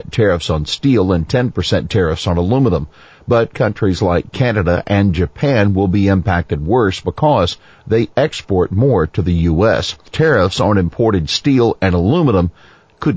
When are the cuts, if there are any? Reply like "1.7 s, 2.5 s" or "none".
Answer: 10.1 s